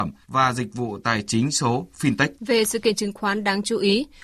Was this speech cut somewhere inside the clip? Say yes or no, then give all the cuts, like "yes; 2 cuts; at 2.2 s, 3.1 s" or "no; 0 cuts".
yes; 1 cut; at 2.4 s